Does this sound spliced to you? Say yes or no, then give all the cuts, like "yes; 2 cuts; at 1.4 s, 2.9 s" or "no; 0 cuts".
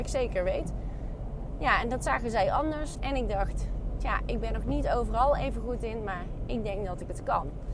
yes; 1 cut; at 2.9 s